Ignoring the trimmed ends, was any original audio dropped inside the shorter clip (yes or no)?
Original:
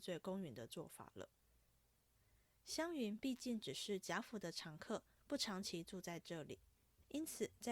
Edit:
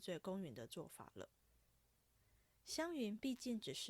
no